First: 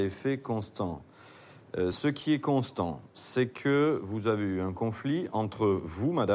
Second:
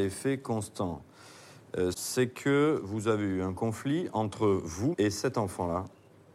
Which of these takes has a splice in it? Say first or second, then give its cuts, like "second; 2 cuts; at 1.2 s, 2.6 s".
second; 2 cuts; at 1.9 s, 4.9 s